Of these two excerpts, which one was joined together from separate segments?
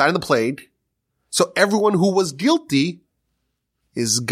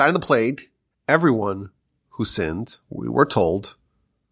second; 1 cut; at 0.9 s

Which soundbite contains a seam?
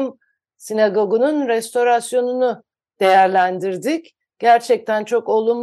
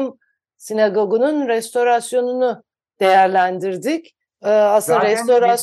second; 1 cut; at 4.3 s

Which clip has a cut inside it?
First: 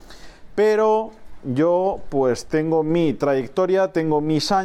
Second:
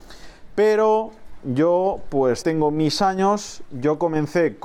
second; 1 cut; at 2.4 s

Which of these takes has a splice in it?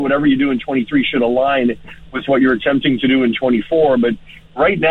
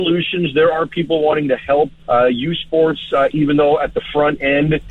second; 2 cuts; at 2.0 s, 3.3 s

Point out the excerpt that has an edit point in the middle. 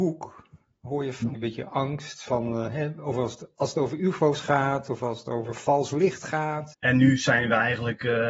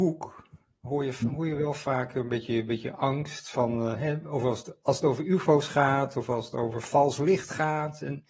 first; 2 cuts; at 1.3 s, 6.7 s

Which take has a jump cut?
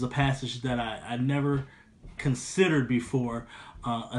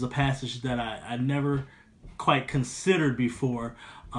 first; 1 cut; at 2.2 s

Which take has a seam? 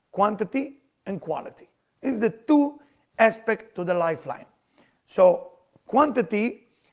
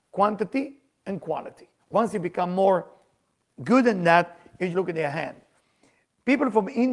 second; 2 cuts; at 1.8 s, 4.7 s

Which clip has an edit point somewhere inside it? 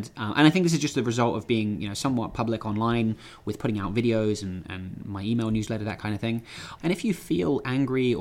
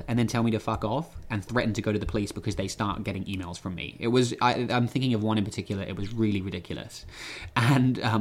first; 1 cut; at 6.8 s

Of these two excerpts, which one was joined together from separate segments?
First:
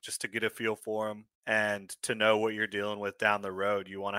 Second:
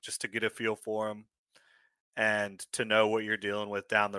first; 1 cut; at 1.3 s

